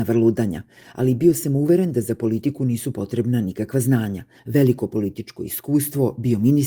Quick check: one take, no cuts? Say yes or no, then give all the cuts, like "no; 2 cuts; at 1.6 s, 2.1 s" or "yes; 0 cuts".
no; 1 cut; at 4.4 s